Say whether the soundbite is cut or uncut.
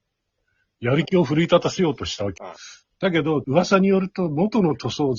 cut